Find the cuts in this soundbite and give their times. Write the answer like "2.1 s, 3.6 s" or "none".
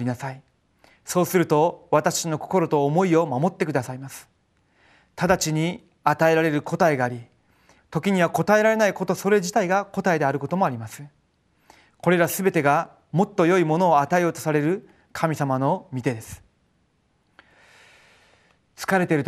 7.8 s